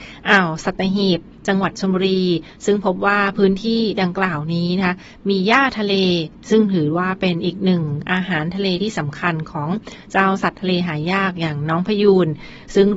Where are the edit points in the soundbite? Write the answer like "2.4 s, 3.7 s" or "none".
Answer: none